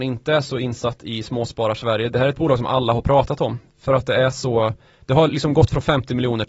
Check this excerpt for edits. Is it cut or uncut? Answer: uncut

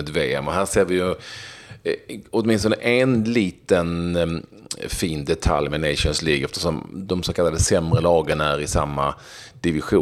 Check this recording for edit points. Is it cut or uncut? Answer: uncut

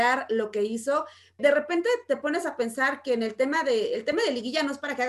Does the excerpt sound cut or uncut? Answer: cut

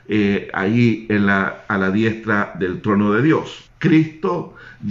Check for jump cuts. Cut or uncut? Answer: cut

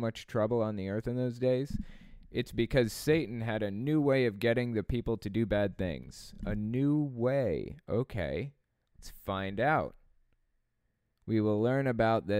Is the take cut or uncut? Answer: uncut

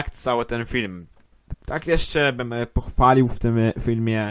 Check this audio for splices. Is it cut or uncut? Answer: cut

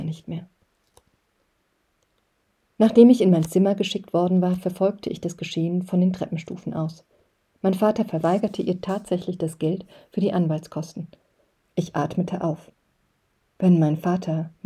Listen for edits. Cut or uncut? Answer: cut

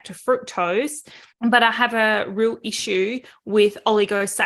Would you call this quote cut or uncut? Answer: cut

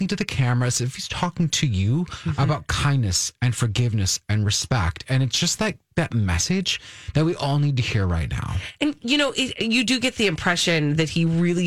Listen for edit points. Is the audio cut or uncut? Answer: uncut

